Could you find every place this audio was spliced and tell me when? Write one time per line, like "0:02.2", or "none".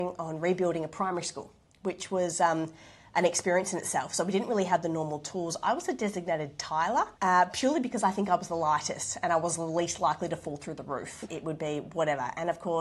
0:07.1
0:11.3